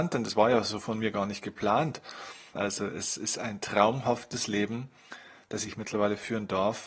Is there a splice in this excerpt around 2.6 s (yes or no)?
yes